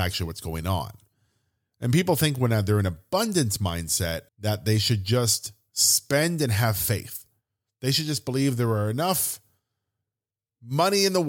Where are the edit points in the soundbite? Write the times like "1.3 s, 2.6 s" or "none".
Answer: 4.3 s